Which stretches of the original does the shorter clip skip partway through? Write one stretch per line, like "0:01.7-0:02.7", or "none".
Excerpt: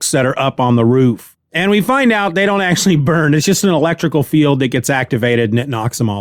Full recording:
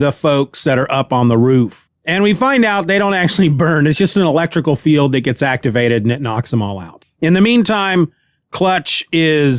none